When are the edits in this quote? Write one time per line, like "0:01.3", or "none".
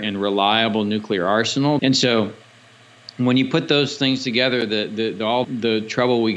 0:01.8
0:05.4